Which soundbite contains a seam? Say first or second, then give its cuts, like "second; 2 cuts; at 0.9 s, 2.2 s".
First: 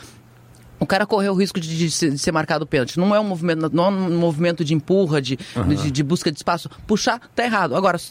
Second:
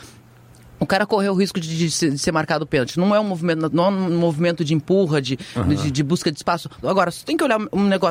second; 1 cut; at 6.8 s